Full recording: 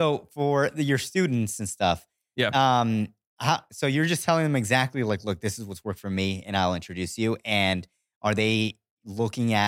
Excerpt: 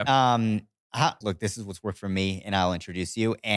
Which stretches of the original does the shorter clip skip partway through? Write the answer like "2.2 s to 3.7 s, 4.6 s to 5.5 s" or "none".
3.7 s to 5.2 s